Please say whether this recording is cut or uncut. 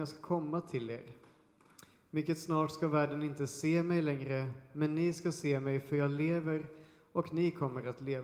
uncut